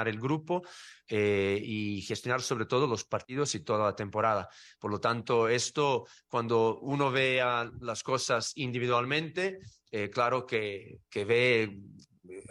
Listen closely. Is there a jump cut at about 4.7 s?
no; 0 cuts

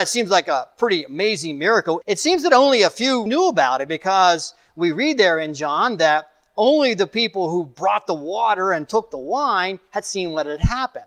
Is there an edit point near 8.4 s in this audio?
no; 2 cuts; at 2.0 s, 3.3 s

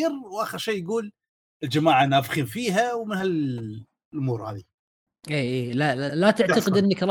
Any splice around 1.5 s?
no; 1 cut; at 6.1 s

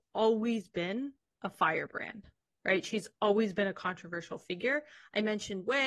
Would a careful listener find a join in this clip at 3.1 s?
no; 0 cuts

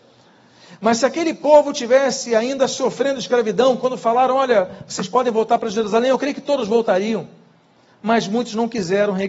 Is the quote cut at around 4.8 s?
no; 0 cuts

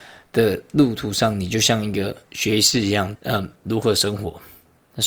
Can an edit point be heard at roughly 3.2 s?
yes; 1 cut; at 3.2 s

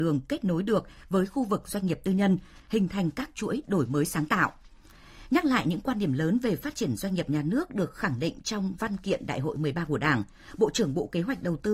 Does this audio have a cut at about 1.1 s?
no; 1 cut; at 2.6 s

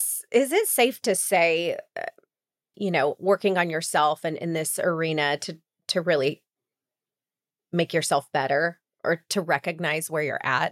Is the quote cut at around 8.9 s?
no; 1 cut; at 2.7 s

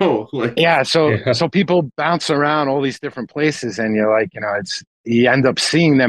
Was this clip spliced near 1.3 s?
no; 0 cuts

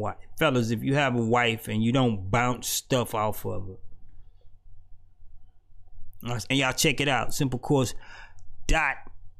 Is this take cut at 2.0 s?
no; 1 cut; at 6.5 s

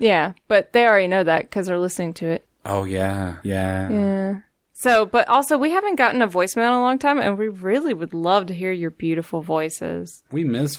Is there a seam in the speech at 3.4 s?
yes; 1 cut; at 3.4 s

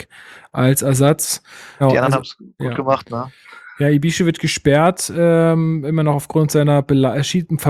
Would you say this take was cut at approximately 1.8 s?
yes; 1 cut; at 1.8 s

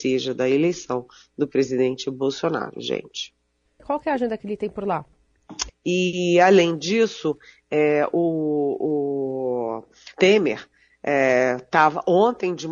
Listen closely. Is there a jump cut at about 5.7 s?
yes; 2 cuts; at 3.8 s, 5.7 s

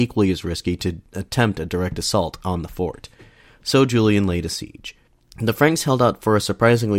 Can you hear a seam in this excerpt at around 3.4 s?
no; 0 cuts

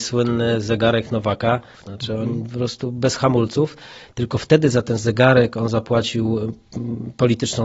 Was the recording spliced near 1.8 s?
yes; 1 cut; at 1.8 s

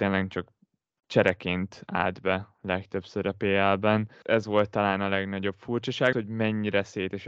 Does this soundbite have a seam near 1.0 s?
no; 2 cuts; at 4.2 s, 6.1 s

